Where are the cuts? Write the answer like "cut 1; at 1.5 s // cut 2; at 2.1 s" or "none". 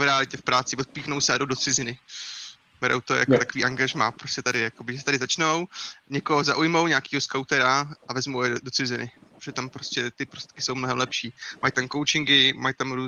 none

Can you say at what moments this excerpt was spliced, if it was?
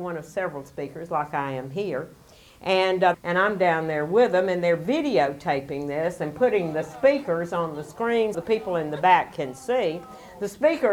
cut 1; at 3.1 s // cut 2; at 8.3 s

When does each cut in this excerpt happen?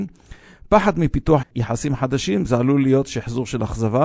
cut 1; at 1.4 s

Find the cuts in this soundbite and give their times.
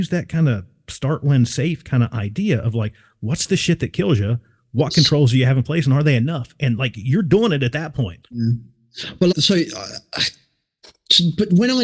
cut 1; at 8.2 s // cut 2; at 9.3 s

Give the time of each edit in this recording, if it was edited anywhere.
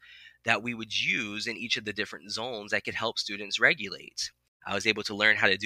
cut 1; at 4.6 s

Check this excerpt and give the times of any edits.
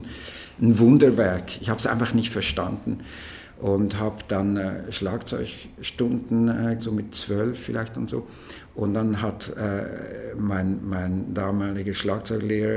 cut 1; at 6.8 s

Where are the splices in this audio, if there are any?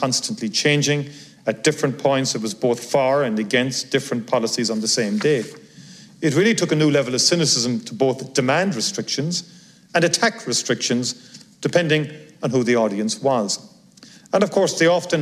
none

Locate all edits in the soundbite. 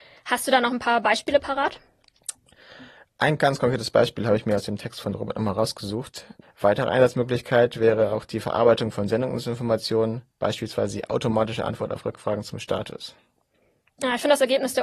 cut 1; at 6.4 s

